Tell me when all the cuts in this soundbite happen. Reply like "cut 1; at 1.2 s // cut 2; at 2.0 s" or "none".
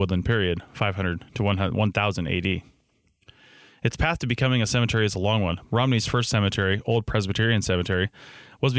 cut 1; at 5.7 s